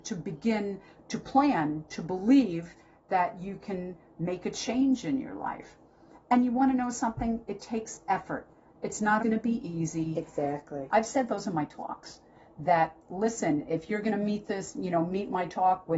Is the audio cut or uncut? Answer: cut